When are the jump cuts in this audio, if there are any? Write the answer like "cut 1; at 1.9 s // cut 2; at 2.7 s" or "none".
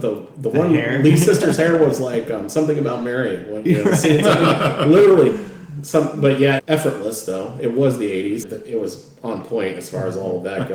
cut 1; at 6.6 s // cut 2; at 8.4 s